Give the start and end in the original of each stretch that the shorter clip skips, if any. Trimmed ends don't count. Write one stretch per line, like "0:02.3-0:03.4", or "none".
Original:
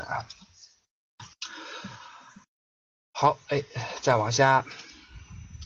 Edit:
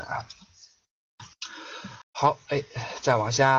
0:02.0-0:03.0